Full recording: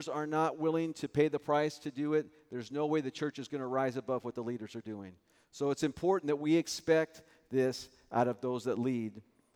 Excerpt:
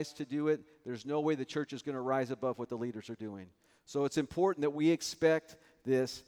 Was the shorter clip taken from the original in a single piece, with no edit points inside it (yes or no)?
yes